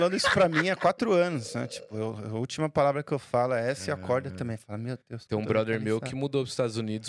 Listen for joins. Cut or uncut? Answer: uncut